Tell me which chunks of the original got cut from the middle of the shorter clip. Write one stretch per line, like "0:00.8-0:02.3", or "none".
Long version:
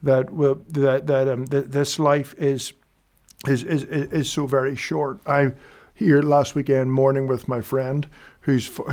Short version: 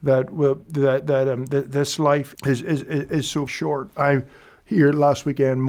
0:02.4-0:03.4
0:04.5-0:04.8

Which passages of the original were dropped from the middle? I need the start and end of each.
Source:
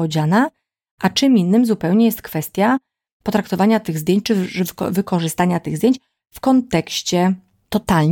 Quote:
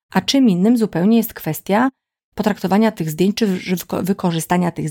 none

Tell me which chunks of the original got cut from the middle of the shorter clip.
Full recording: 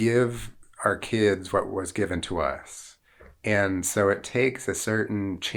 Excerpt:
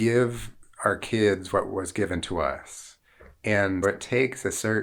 0:03.8-0:04.0

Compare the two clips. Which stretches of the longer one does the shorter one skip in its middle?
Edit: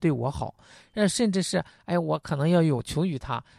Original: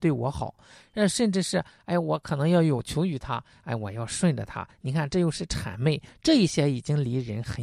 none

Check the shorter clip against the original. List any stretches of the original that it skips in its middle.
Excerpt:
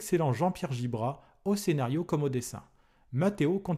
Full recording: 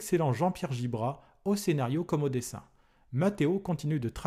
none

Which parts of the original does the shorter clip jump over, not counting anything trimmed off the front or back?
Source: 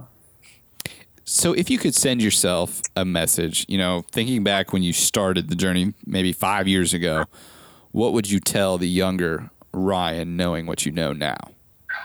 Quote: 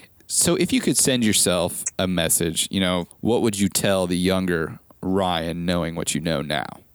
0:04.1-0:07.8

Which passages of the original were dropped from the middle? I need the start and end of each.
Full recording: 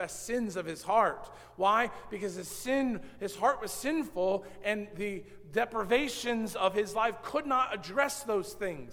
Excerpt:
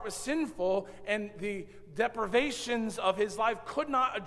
none

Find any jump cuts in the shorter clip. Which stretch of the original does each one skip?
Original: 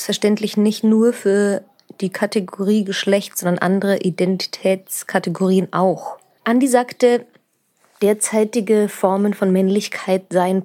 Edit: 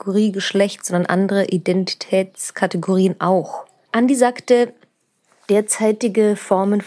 none

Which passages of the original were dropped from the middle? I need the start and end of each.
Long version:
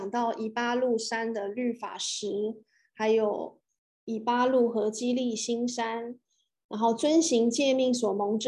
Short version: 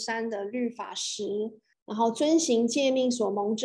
0:02.8-0:06.6

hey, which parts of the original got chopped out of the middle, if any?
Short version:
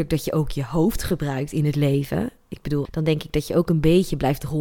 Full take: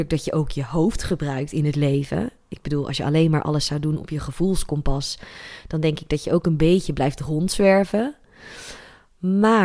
0:02.8-0:05.6

